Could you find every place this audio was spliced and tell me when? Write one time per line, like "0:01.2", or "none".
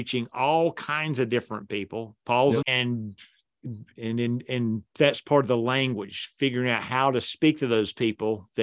0:02.6